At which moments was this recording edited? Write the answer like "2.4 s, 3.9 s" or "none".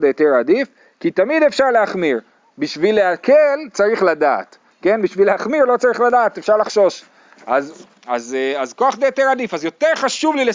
none